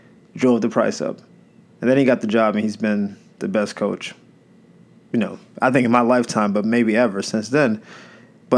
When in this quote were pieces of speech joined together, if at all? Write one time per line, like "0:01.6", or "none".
none